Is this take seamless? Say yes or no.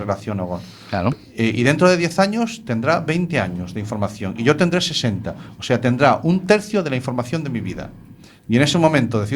yes